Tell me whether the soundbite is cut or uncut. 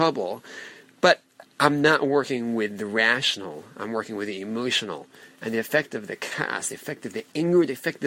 uncut